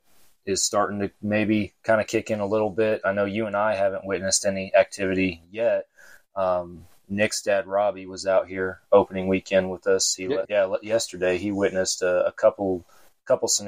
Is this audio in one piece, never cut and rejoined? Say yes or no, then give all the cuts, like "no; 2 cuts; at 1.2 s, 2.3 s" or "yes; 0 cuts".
no; 1 cut; at 10.5 s